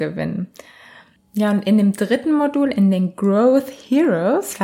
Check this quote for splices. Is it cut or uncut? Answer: uncut